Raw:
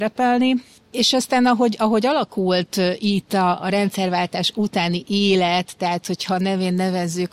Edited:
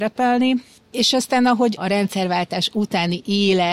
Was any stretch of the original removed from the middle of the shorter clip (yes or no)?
yes